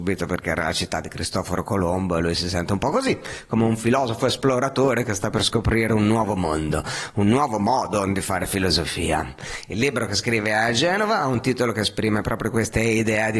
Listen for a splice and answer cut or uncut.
uncut